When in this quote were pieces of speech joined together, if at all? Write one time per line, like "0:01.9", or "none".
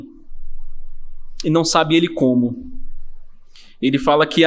none